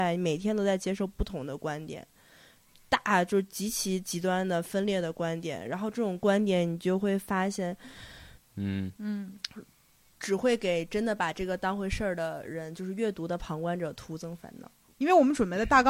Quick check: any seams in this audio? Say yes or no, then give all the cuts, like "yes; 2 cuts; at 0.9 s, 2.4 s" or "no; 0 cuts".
yes; 2 cuts; at 8.4 s, 14.9 s